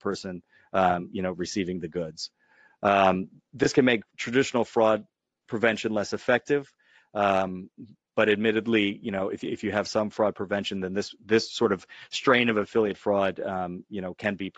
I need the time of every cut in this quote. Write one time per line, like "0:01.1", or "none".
none